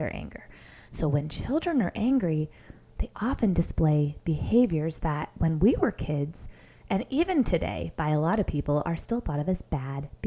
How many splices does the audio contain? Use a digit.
0